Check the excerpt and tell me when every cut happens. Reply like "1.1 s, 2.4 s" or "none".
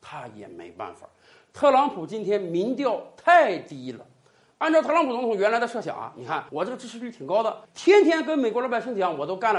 6.5 s, 7.6 s